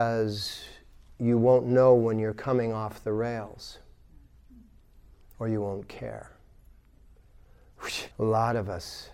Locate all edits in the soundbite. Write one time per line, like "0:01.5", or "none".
0:08.1